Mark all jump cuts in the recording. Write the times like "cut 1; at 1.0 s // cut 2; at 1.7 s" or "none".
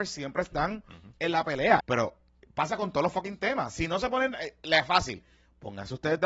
cut 1; at 1.8 s